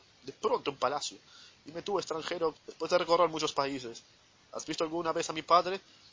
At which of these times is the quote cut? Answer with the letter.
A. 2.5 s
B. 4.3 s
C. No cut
A